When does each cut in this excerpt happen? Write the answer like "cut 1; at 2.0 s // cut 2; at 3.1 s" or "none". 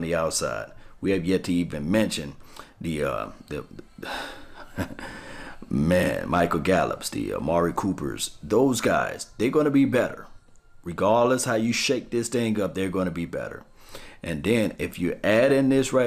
none

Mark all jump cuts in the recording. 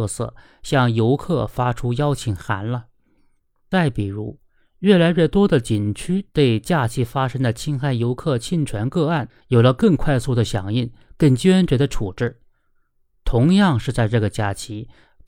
none

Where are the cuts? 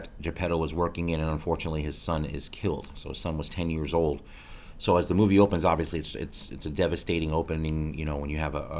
none

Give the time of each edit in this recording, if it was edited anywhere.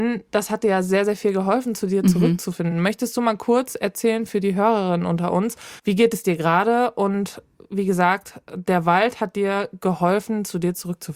none

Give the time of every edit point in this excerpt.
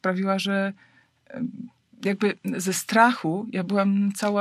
none

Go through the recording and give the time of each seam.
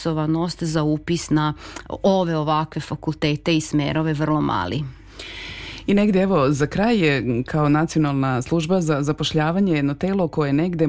none

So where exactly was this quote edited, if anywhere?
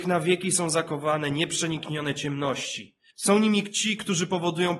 cut 1; at 3.1 s

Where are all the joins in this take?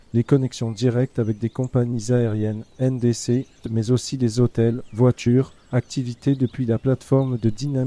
cut 1; at 3.6 s

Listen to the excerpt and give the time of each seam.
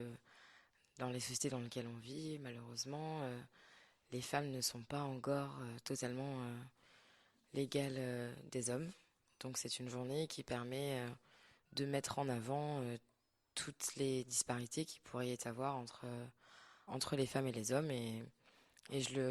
cut 1; at 16.9 s

